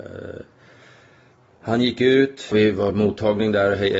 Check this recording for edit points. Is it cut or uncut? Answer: cut